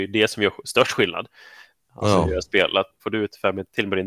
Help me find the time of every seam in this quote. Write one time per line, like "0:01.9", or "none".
0:03.0

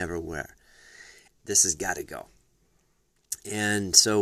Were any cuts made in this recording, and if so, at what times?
0:01.3

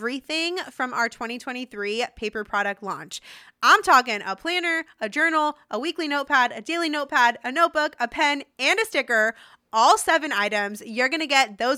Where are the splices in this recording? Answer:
none

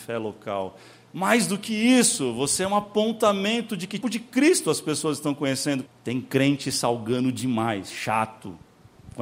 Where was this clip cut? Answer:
0:04.0
0:05.9

